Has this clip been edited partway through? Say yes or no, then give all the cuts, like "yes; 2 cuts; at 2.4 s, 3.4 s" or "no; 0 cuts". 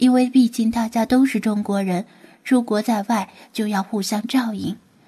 no; 0 cuts